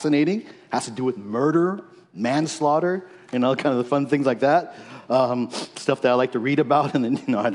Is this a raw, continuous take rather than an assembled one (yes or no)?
yes